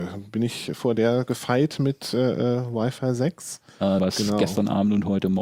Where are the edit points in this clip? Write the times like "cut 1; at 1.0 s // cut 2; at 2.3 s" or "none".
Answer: cut 1; at 4.0 s